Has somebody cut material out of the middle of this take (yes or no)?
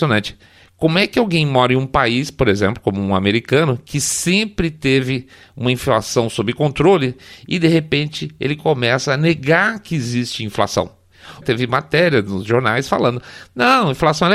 yes